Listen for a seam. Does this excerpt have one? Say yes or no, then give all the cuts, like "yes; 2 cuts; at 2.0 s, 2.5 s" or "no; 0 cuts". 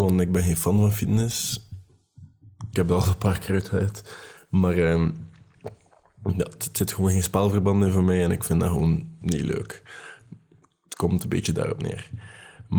no; 0 cuts